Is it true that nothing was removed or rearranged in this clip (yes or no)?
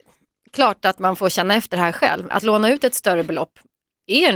no